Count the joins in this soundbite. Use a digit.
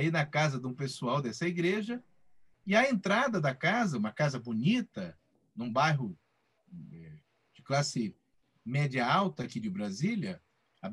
0